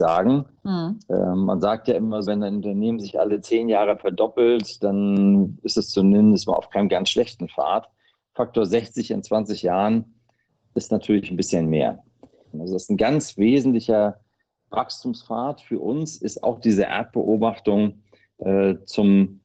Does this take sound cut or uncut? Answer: cut